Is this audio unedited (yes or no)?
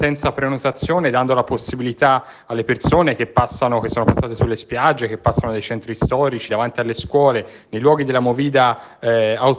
no